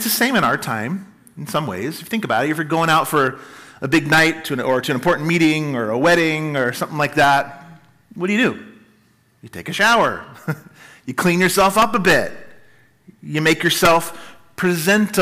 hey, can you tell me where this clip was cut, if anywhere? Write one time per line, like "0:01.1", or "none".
none